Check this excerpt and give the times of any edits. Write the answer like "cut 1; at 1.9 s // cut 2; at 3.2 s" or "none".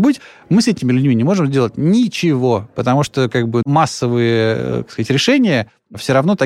cut 1; at 3.6 s

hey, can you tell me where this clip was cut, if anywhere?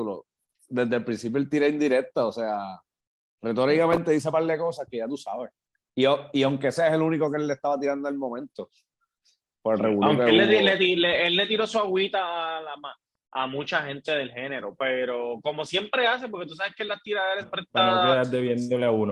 cut 1; at 14.8 s // cut 2; at 17.4 s

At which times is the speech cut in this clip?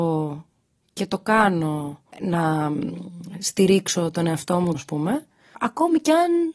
cut 1; at 2.1 s // cut 2; at 4.7 s

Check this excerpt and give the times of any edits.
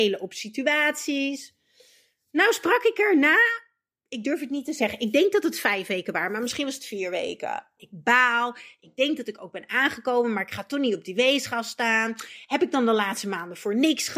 cut 1; at 7.8 s

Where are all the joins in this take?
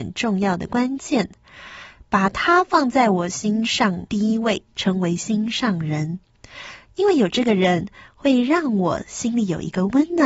cut 1; at 6.9 s

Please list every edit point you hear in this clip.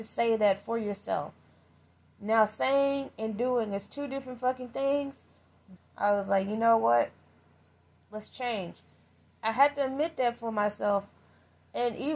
cut 1; at 5.8 s

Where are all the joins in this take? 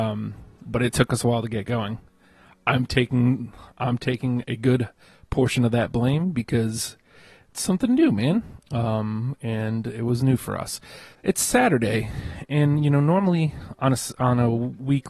cut 1; at 8.6 s // cut 2; at 11.1 s

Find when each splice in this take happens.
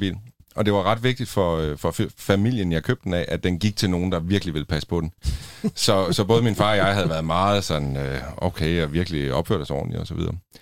none

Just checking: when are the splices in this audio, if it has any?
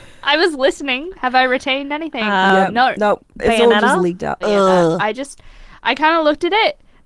cut 1; at 4.4 s

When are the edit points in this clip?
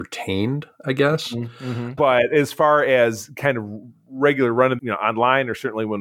cut 1; at 2.0 s // cut 2; at 4.8 s

